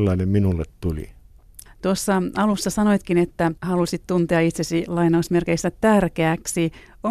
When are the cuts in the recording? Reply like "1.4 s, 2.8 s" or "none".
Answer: 1.7 s, 3.6 s